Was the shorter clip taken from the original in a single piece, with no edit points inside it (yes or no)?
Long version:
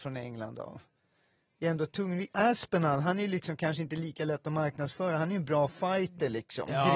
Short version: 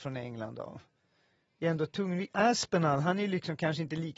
yes